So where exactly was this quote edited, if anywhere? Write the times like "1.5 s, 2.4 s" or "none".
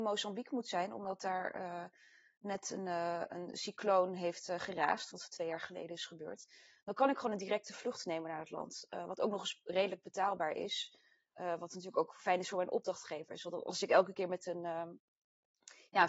none